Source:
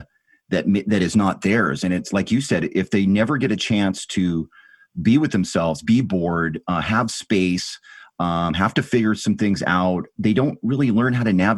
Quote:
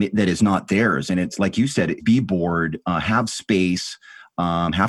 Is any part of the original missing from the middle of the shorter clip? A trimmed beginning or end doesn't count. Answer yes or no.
yes